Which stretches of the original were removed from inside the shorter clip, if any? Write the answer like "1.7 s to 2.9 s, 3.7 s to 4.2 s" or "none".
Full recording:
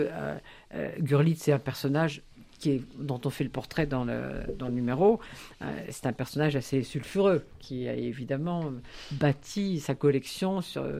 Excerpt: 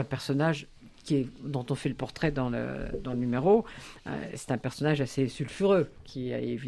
none